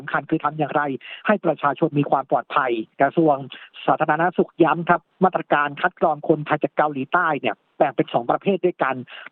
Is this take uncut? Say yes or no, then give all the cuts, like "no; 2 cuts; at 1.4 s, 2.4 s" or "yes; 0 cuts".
no; 1 cut; at 2.9 s